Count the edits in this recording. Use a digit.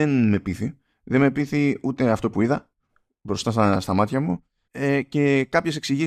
1